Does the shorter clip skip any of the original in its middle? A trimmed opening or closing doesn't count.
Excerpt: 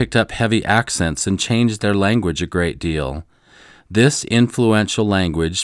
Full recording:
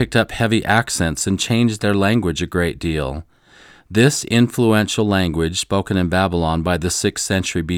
no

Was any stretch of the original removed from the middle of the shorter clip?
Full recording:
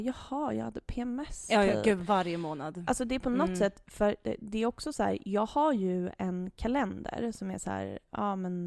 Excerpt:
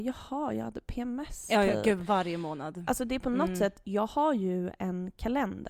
yes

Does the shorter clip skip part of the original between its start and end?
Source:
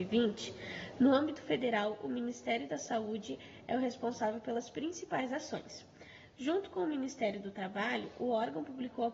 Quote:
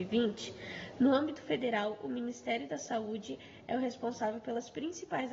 no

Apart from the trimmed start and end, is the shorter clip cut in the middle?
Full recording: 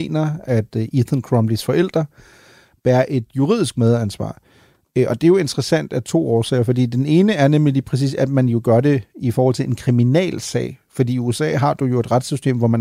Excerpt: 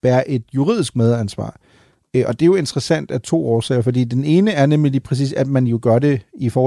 no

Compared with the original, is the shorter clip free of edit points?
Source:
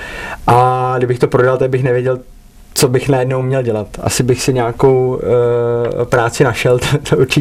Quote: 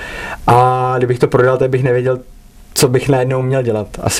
yes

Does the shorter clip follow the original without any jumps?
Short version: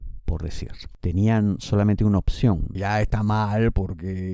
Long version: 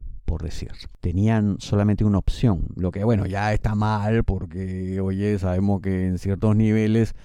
no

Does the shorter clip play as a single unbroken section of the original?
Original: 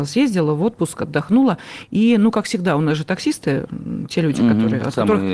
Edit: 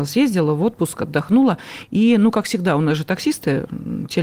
yes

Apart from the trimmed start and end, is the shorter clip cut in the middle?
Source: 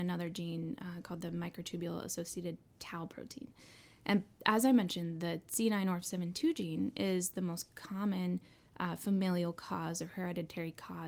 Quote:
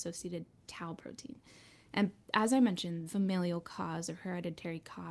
yes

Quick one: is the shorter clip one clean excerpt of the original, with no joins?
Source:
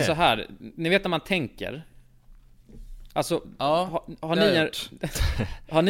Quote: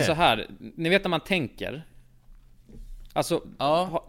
yes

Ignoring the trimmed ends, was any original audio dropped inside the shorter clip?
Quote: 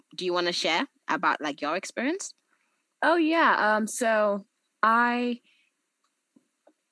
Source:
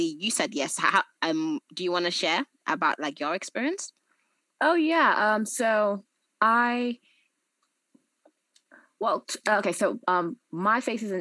no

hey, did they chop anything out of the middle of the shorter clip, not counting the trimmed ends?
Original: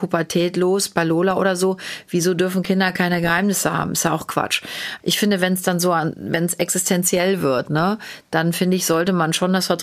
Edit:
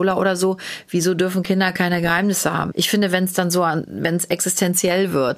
yes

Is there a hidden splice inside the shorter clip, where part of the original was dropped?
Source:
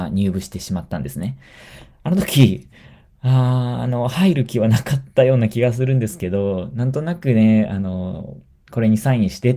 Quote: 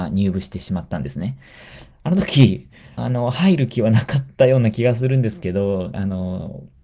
yes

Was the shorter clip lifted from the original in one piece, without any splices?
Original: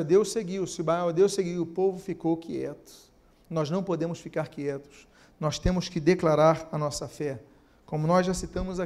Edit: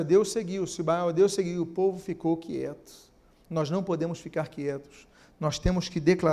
yes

